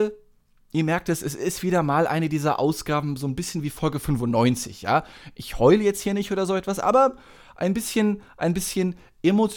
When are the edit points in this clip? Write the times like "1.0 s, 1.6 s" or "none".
none